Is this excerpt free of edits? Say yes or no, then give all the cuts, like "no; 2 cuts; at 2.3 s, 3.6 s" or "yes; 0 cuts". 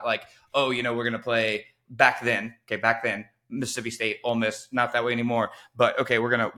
yes; 0 cuts